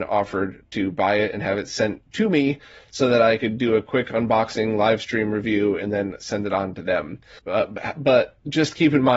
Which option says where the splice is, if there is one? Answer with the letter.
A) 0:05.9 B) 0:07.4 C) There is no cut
B